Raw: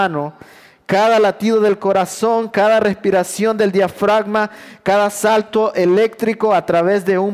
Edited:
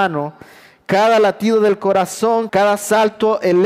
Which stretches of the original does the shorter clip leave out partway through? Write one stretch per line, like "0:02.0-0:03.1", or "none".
0:02.5-0:04.8